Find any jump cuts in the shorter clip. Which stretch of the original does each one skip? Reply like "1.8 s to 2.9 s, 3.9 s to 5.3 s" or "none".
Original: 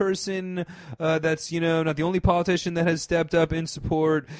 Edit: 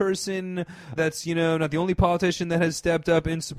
1.0 s to 1.2 s